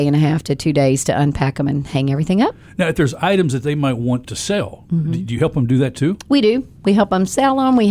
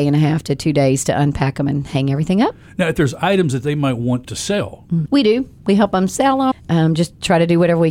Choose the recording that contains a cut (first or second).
second